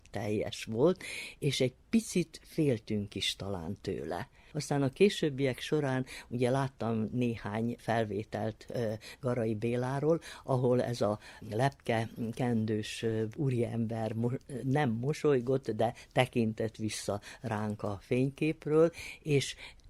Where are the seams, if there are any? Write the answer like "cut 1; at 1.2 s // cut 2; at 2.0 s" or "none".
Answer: cut 1; at 4.5 s